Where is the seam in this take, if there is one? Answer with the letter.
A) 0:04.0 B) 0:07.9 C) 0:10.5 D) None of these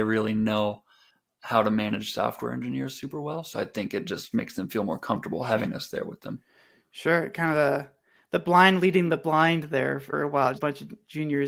C